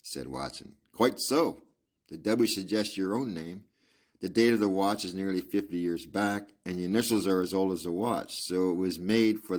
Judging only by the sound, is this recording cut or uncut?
uncut